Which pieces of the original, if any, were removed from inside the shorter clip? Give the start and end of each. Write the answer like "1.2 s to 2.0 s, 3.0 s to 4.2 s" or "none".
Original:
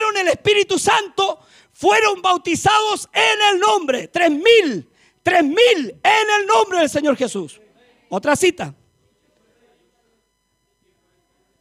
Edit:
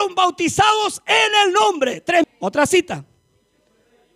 4.3 s to 7.9 s